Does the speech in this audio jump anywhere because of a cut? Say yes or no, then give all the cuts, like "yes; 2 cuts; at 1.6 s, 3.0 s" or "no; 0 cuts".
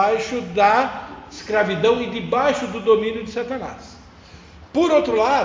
no; 0 cuts